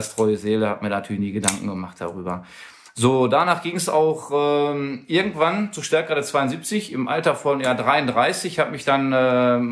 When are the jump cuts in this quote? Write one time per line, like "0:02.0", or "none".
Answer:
none